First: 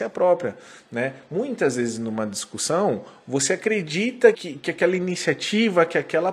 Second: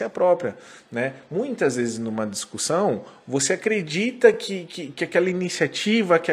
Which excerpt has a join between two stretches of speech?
first; 1 cut; at 4.3 s

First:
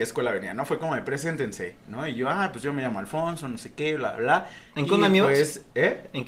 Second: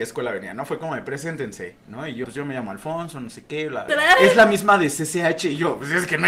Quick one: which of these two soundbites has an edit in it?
second; 2 cuts; at 2.2 s, 3.9 s

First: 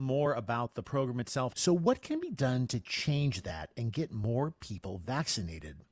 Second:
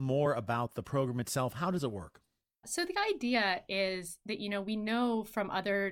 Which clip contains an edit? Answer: first; 1 cut; at 1.5 s

